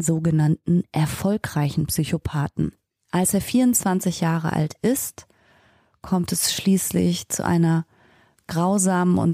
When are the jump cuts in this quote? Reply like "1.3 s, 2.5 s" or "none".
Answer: none